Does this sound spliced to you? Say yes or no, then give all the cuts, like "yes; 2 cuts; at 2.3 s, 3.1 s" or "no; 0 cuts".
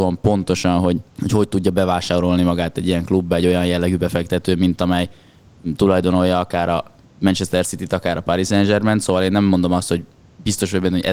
yes; 1 cut; at 1.1 s